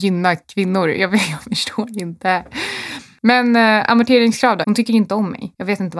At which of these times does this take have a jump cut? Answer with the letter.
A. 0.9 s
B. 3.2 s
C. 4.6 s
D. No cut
C